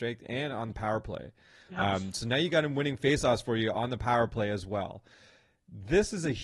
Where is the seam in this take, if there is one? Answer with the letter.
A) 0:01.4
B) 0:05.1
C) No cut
C